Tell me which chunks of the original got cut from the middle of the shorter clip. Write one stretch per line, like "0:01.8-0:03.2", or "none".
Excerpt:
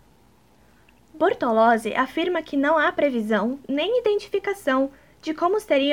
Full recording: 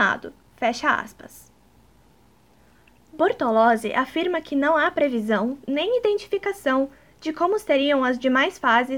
none